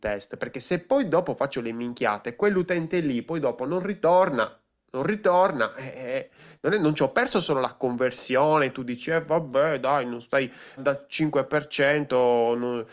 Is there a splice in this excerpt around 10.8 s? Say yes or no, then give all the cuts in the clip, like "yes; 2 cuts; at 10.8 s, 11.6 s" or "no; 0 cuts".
yes; 1 cut; at 10.8 s